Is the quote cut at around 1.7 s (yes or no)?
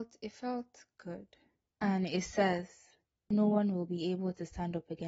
yes